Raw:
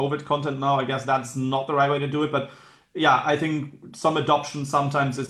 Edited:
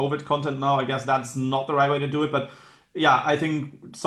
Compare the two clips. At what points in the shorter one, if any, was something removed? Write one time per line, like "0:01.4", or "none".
none